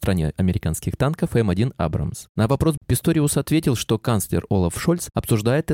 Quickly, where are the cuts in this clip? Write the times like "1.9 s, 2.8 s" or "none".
2.8 s